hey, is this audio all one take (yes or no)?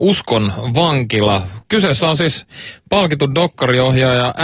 yes